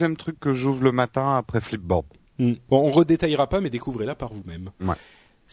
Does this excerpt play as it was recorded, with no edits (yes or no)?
no